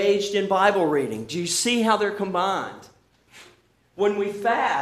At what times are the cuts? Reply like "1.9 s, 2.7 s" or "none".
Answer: none